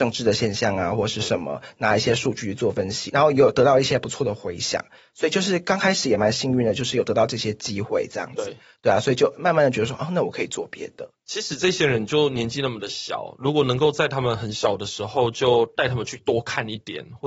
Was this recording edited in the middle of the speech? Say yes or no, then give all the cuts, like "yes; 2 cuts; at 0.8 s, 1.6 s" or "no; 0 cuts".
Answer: yes; 1 cut; at 11.2 s